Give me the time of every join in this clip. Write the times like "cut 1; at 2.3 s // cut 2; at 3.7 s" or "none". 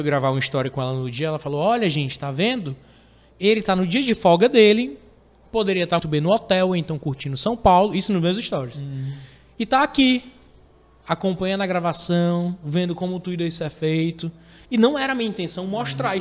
cut 1; at 6.0 s